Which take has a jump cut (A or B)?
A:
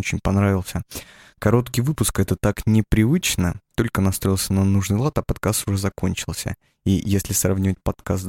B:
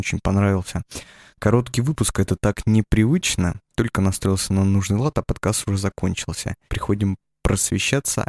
B